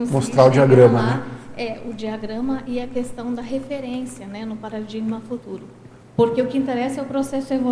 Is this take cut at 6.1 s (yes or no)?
yes